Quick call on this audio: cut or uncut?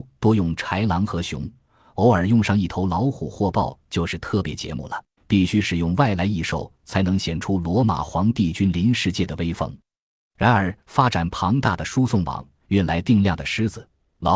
cut